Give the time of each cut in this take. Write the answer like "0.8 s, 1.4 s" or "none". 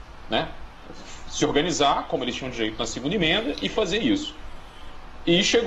none